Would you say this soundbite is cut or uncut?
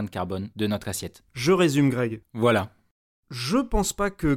cut